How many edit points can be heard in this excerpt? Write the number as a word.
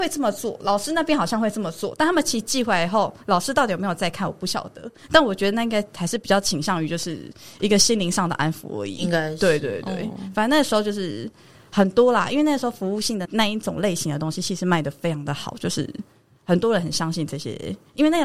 one